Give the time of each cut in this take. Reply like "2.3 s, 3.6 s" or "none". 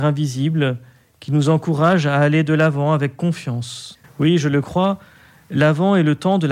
4.0 s

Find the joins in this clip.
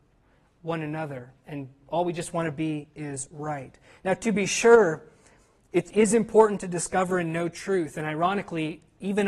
none

